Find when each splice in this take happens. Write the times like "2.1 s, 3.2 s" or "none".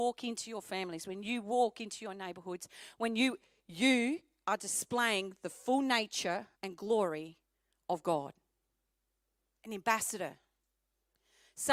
6.6 s